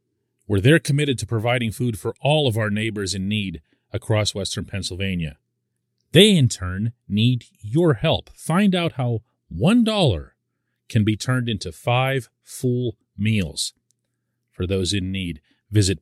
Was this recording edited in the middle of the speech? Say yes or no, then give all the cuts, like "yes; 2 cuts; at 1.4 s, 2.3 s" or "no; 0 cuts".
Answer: no; 0 cuts